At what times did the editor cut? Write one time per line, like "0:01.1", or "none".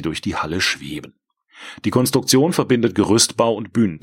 none